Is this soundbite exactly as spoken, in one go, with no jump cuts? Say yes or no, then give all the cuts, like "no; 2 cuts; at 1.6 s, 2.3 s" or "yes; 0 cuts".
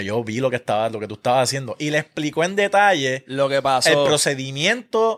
yes; 0 cuts